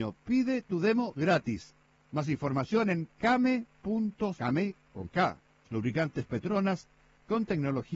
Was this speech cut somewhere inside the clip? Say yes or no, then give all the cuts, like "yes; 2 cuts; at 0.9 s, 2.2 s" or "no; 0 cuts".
yes; 2 cuts; at 4.4 s, 5.6 s